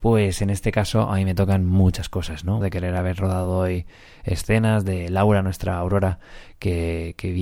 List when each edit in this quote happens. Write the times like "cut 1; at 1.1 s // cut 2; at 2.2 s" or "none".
cut 1; at 2.6 s